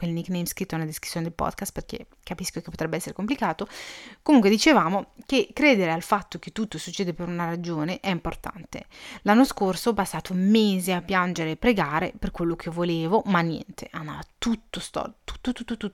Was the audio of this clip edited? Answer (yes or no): no